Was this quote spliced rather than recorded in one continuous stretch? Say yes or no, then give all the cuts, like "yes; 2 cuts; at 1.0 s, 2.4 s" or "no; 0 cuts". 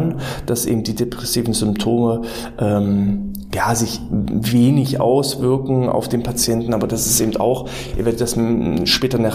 no; 0 cuts